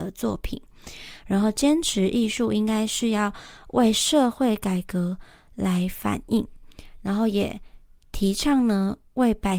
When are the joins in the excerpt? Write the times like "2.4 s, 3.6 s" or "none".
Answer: 1.2 s